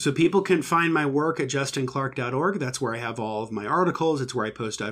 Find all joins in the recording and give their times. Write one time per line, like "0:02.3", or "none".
none